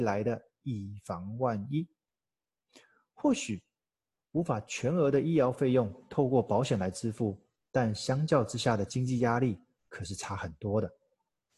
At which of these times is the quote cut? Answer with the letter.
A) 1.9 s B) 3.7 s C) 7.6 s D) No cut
D